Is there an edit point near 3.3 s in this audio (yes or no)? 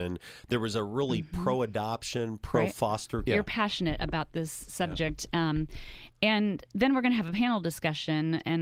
yes